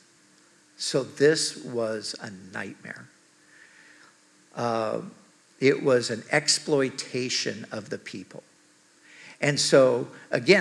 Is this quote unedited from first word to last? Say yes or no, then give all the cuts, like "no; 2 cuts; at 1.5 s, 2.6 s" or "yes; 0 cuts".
yes; 0 cuts